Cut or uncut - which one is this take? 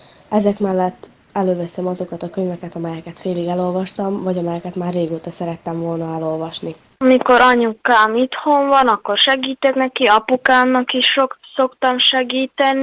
cut